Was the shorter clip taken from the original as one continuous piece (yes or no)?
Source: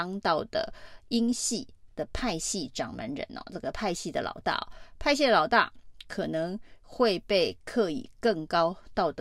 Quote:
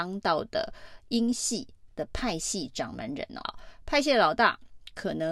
no